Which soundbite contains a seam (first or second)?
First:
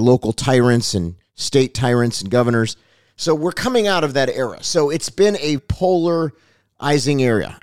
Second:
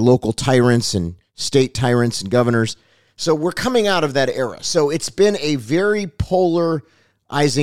first